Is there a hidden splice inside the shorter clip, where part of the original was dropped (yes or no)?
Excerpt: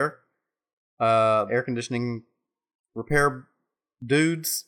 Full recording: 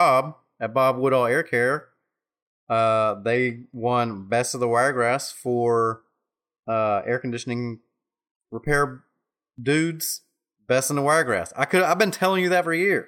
yes